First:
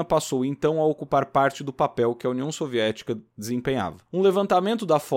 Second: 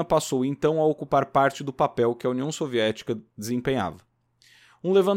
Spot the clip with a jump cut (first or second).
first